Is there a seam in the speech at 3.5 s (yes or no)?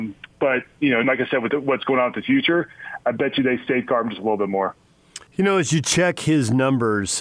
no